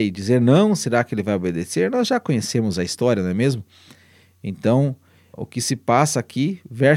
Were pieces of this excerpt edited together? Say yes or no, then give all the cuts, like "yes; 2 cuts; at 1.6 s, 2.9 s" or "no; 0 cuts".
yes; 1 cut; at 5.3 s